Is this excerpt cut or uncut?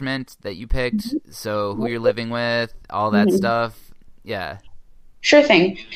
uncut